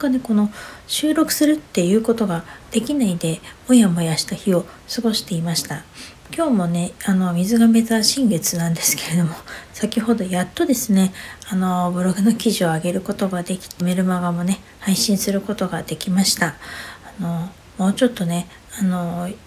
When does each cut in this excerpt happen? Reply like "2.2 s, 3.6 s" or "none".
13.8 s